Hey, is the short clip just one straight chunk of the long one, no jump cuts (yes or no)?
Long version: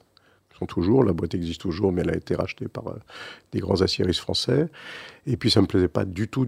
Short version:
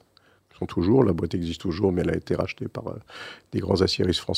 yes